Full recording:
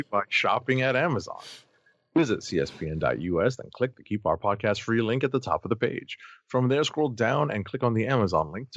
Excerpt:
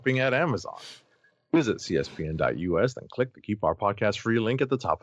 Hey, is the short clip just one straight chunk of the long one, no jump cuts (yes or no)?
yes